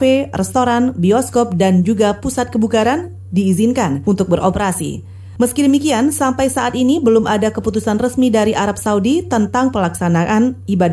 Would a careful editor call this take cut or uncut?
uncut